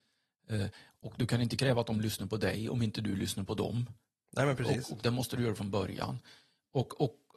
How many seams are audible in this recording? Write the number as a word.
zero